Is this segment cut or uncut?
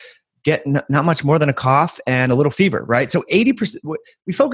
uncut